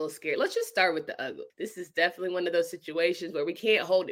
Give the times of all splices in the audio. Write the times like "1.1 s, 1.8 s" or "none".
1.5 s